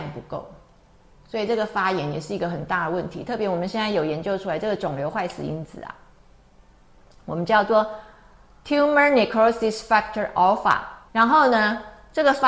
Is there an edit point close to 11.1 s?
yes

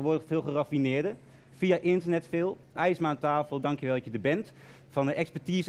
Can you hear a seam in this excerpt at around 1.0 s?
no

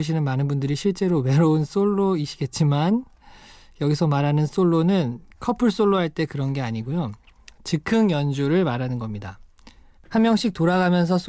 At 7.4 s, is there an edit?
no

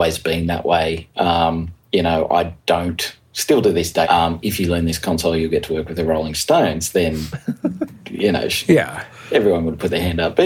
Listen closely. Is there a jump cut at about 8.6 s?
no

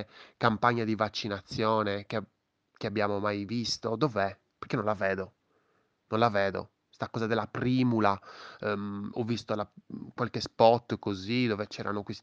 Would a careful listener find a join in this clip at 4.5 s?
yes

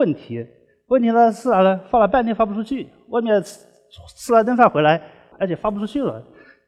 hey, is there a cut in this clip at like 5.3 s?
yes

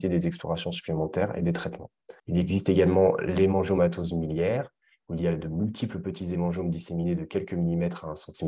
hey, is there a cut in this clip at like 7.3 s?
no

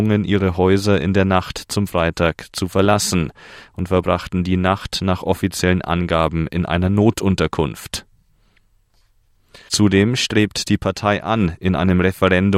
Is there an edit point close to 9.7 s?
yes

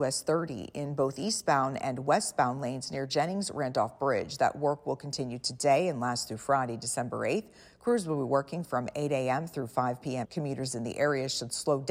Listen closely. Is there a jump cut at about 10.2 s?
yes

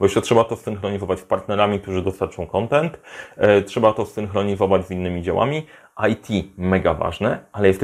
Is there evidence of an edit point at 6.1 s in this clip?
no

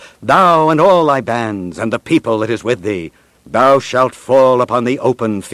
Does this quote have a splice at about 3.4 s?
yes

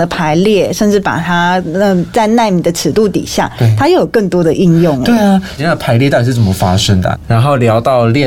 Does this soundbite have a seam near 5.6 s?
yes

